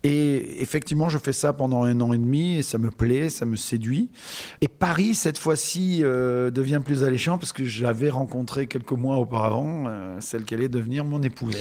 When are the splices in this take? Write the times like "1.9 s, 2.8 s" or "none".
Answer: 4.6 s